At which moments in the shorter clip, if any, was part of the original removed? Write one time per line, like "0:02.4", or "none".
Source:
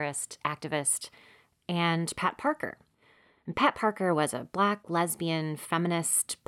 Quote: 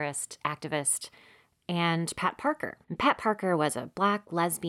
0:02.8